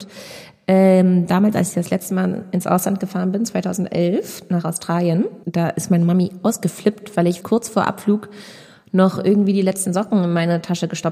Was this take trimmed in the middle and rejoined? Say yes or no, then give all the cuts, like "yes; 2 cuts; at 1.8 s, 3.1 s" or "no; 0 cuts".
yes; 2 cuts; at 5.4 s, 7.4 s